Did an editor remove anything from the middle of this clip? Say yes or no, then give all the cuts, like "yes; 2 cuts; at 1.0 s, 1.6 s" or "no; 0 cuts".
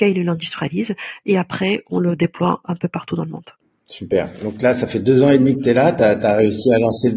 no; 0 cuts